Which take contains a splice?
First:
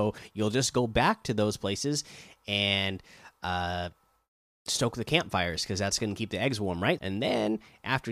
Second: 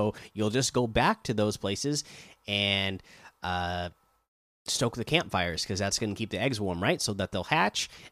first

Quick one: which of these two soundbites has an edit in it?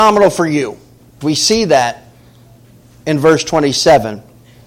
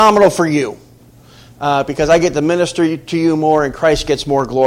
first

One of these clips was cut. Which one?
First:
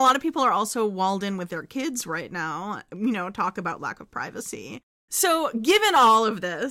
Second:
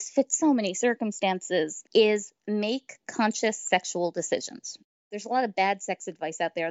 second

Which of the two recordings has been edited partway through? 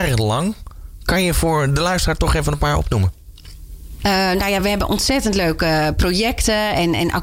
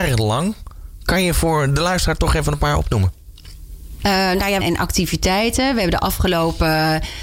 second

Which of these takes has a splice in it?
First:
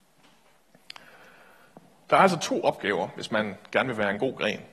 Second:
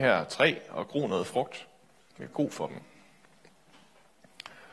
second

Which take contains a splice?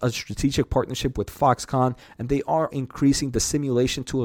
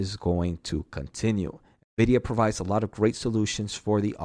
first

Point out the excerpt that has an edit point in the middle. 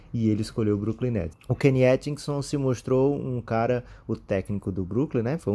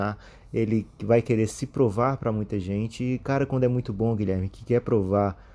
first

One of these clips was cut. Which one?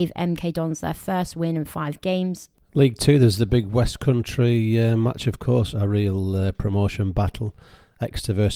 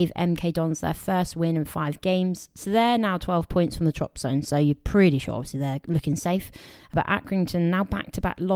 first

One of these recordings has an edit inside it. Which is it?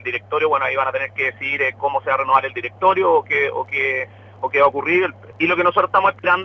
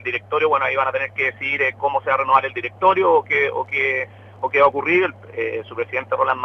first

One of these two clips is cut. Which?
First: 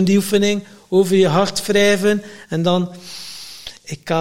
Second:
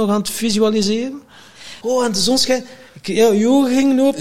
second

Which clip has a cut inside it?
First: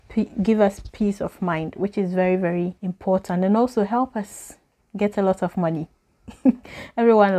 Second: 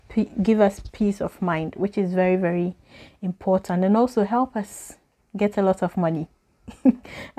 first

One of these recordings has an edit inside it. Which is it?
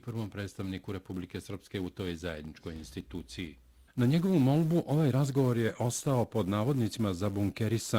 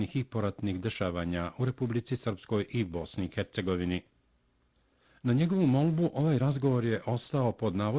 first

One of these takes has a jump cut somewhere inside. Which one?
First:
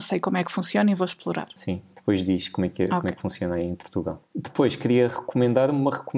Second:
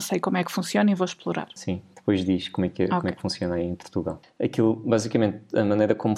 second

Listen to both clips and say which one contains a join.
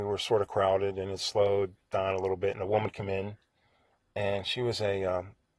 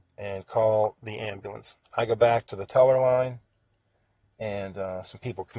second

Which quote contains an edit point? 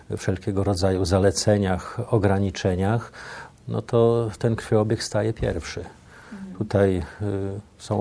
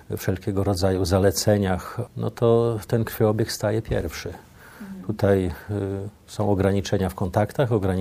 second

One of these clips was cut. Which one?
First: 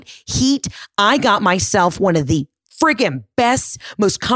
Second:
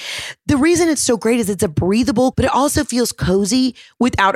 second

